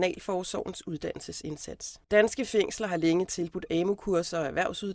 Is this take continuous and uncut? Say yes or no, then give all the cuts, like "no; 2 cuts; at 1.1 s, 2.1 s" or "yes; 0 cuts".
no; 1 cut; at 2.0 s